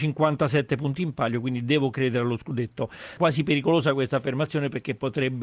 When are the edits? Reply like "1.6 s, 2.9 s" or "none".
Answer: 3.2 s